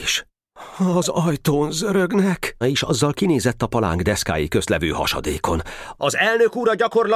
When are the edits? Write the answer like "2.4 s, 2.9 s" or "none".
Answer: 2.6 s, 6.0 s